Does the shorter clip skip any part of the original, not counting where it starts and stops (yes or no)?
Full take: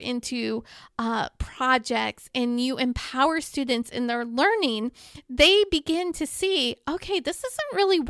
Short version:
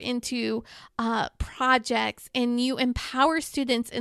no